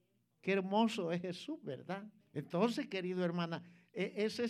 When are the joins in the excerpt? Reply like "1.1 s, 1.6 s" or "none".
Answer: 2.2 s